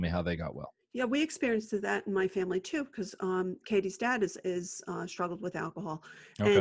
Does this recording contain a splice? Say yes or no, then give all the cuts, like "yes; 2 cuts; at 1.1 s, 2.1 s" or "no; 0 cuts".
no; 0 cuts